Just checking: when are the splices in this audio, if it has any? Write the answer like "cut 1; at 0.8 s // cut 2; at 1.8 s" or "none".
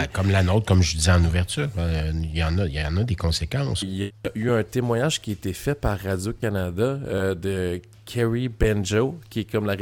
cut 1; at 3.8 s